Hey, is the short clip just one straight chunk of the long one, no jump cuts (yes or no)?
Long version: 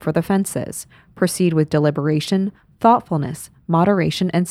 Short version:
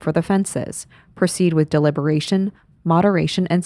no